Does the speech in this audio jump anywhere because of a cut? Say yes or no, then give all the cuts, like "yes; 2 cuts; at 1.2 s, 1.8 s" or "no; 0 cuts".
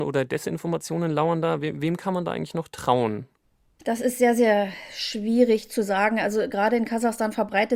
no; 0 cuts